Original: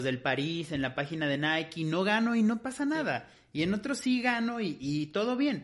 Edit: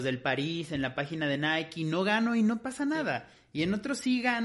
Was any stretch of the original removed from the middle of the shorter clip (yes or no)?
no